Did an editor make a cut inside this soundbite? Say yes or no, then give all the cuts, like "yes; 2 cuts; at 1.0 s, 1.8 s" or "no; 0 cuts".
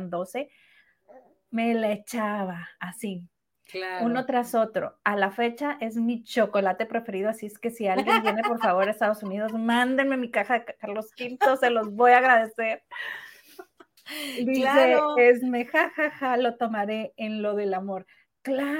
no; 0 cuts